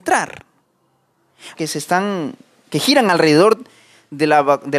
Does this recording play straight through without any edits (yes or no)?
no